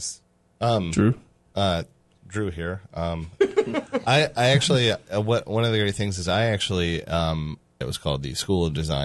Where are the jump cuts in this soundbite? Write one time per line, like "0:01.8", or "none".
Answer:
0:07.8